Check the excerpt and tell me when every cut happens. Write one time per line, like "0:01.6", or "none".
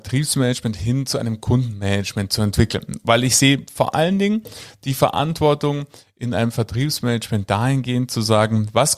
none